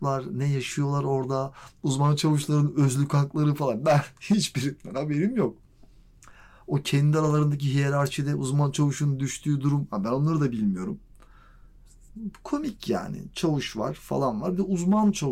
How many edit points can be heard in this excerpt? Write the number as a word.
zero